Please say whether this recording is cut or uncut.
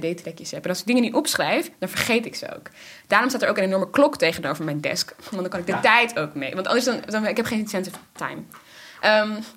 uncut